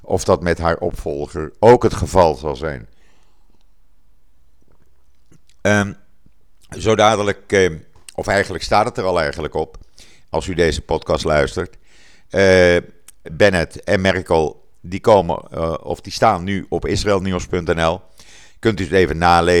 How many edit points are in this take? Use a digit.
1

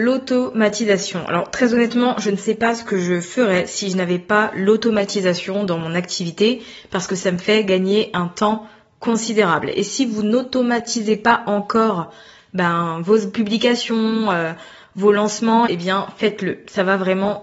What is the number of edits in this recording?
1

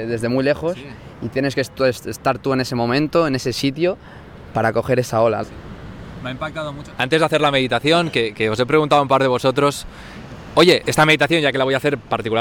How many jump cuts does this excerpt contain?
3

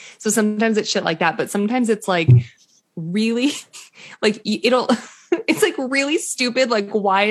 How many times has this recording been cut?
0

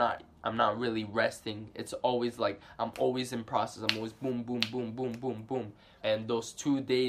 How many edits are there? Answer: 1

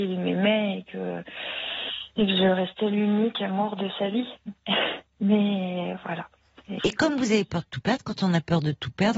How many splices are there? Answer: 1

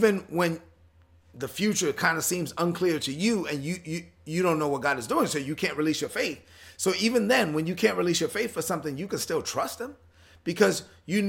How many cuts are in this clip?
0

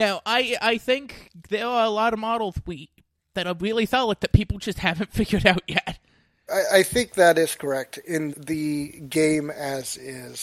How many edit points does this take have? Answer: 2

